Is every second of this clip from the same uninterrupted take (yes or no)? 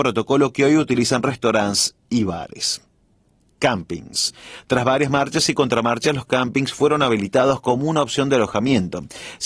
yes